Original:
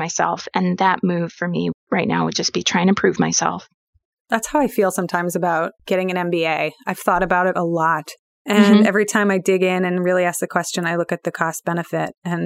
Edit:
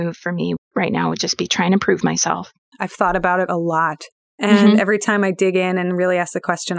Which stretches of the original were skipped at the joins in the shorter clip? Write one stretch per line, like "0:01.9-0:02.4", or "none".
0:03.9-0:06.8